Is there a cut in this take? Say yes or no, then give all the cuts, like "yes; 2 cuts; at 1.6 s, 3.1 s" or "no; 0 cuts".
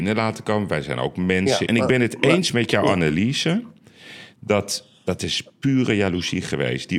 yes; 1 cut; at 1.7 s